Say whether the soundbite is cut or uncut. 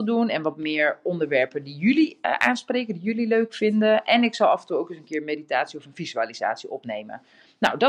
uncut